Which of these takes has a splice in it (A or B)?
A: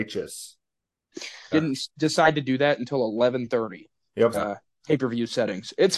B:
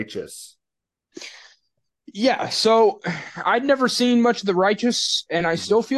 A